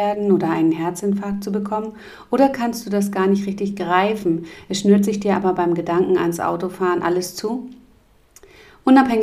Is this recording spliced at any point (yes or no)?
no